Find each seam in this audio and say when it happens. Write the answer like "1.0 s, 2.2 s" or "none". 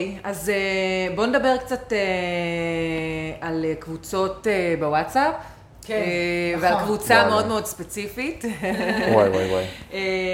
none

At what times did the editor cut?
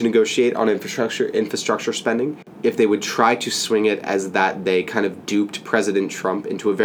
none

